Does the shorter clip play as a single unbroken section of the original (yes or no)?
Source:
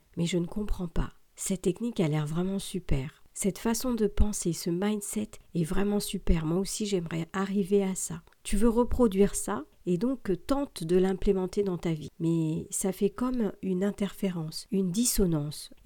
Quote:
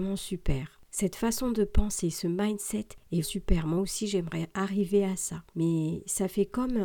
no